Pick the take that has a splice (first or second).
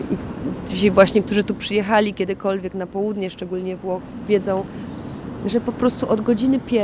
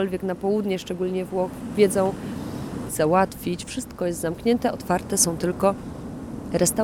second